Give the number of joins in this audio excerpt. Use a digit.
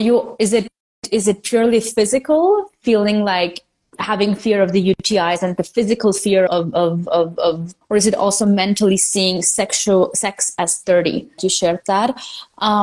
3